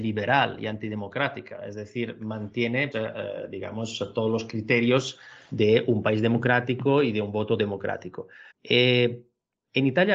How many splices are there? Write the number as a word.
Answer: two